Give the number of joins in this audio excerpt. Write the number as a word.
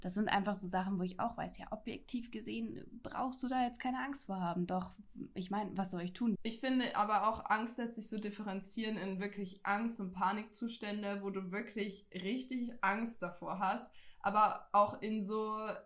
one